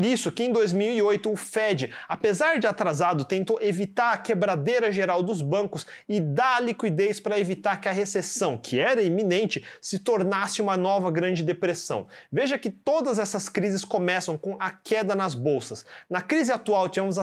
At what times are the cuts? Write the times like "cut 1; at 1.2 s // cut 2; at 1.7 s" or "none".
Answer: none